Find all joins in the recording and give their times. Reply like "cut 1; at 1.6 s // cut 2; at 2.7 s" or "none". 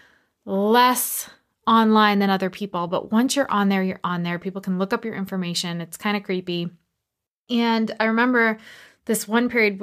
none